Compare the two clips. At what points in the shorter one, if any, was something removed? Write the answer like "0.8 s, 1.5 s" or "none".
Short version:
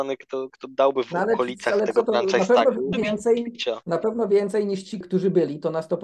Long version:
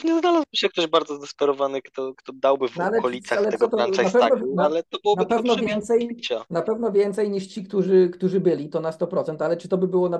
2.9 s, 5.0 s